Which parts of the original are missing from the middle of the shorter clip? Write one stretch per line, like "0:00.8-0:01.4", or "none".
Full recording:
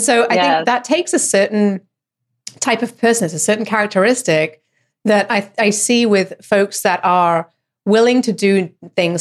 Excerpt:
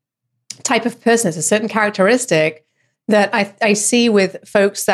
none

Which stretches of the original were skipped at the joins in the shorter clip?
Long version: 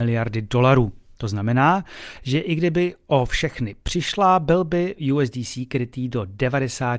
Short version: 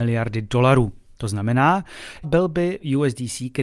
0:02.2-0:04.4

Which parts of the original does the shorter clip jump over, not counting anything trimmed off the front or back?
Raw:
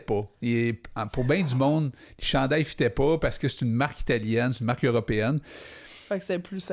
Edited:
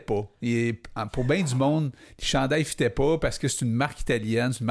none

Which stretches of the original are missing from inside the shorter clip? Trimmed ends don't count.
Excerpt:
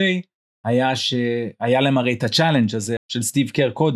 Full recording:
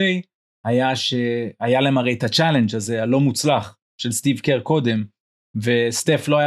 0:03.0-0:03.9

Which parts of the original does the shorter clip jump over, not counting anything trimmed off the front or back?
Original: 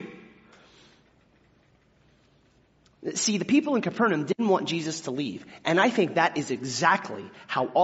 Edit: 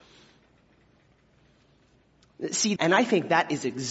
0:03.4-0:05.6

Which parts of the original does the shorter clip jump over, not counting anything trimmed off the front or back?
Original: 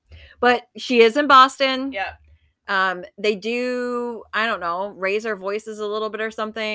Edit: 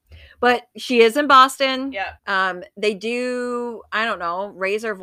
0:02.2-0:02.6

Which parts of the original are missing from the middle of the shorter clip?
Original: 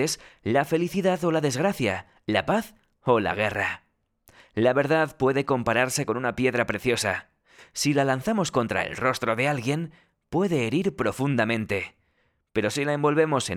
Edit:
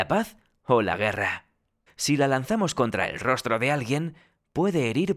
0:04.2-0:07.6

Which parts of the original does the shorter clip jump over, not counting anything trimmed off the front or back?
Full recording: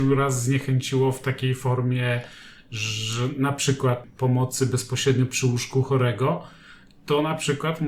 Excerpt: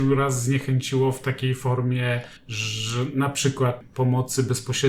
0:02.4-0:02.6

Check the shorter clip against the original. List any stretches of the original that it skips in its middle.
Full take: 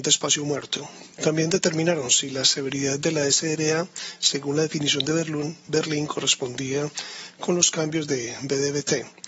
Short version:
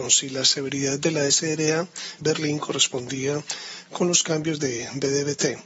0:04.2-0:05.7

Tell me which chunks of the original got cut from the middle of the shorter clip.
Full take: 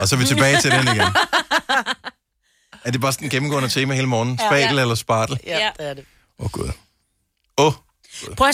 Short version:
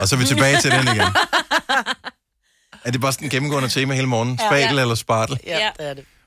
none

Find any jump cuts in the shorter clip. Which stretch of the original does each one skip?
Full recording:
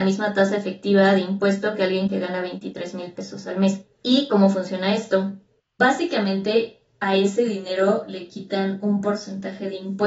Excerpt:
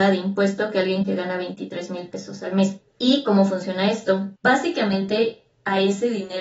0:05.4-0:05.7

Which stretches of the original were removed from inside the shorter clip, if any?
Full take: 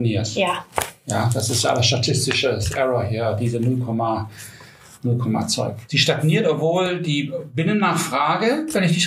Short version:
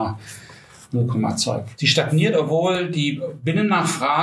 none

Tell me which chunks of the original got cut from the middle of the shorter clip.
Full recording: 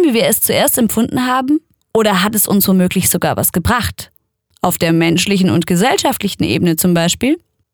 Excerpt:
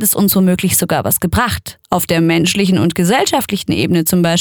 0:04.2-0:04.6

